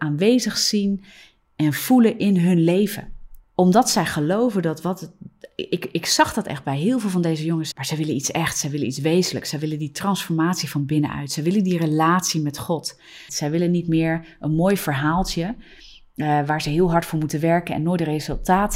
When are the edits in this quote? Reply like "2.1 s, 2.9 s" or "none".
3.5 s, 7.7 s, 13.3 s